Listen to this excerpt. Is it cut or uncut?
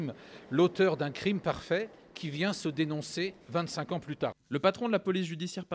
cut